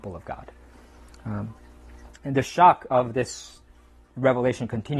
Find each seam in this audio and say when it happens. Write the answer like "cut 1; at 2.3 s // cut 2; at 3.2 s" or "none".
cut 1; at 2.2 s